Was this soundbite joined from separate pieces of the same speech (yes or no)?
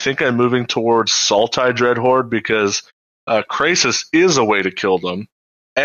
no